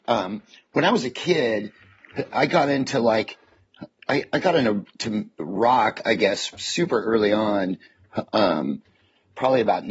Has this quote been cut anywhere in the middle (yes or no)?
yes